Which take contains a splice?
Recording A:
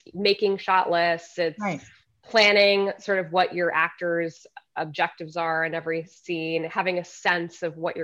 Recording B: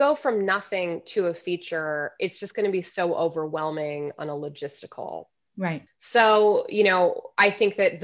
B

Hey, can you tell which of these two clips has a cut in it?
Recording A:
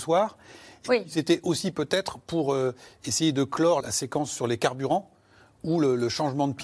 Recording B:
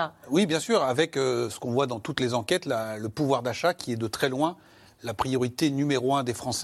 A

